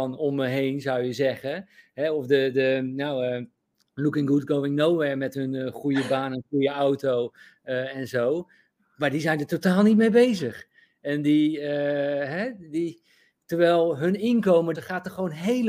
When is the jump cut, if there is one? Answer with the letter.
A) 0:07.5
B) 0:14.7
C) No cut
B